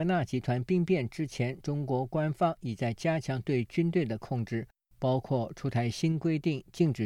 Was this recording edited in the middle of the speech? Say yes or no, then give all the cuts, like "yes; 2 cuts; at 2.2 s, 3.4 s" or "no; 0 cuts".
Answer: no; 0 cuts